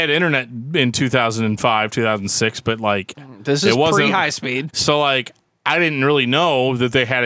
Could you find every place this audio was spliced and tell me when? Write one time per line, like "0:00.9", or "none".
0:04.7